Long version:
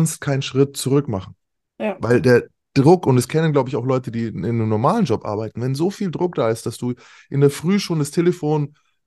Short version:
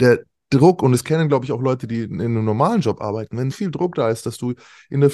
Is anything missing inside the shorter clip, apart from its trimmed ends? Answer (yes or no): yes